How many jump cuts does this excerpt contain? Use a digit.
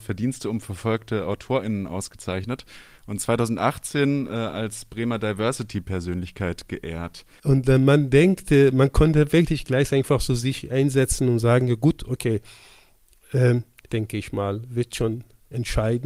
2